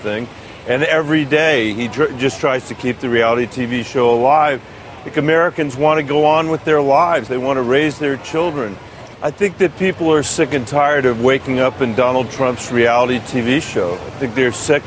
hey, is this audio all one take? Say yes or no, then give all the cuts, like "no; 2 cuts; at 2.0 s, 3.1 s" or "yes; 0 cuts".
no; 3 cuts; at 7.3 s, 9.1 s, 10.2 s